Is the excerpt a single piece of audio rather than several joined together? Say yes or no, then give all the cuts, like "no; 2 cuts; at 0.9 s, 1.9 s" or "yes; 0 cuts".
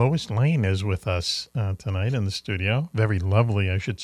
yes; 0 cuts